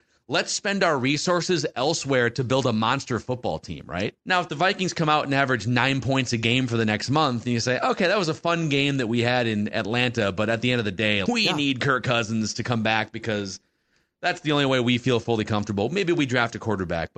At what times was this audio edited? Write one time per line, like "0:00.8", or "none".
0:04.2
0:11.3